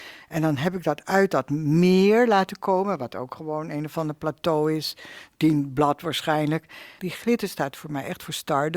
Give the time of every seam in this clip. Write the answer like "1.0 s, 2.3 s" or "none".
7.0 s